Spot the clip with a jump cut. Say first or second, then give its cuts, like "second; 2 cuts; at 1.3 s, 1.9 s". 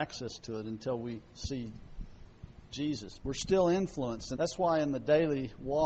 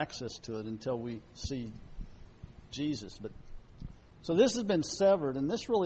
first; 2 cuts; at 3.2 s, 4.3 s